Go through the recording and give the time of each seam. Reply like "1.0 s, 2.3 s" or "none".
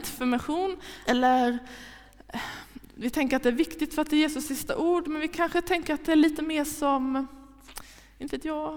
1.0 s